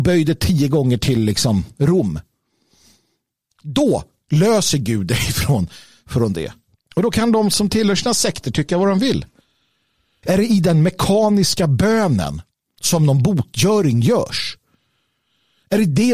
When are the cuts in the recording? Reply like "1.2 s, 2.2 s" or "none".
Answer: 6.7 s, 10.2 s